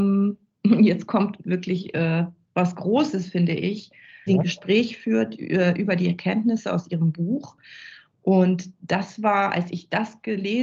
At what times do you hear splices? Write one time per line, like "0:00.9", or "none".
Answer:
0:04.3

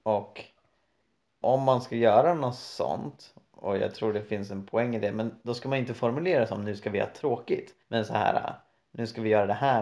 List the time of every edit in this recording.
0:01.4
0:07.8

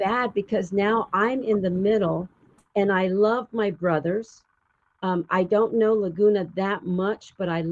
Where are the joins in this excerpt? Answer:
none

